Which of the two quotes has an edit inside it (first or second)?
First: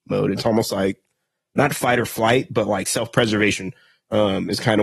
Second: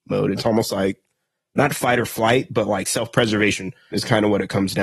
second